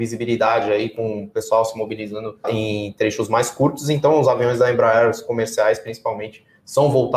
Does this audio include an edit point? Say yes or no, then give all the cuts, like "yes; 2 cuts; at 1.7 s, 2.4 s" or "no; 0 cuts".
yes; 1 cut; at 2.4 s